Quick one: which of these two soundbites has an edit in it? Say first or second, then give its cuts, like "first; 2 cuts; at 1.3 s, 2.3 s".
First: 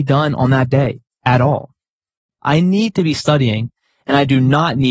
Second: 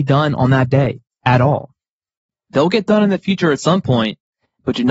first; 1 cut; at 2.4 s